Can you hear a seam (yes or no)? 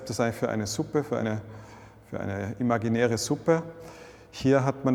no